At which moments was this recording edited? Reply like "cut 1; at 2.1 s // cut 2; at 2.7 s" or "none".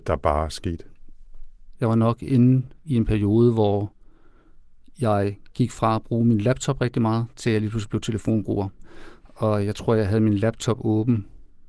cut 1; at 1.8 s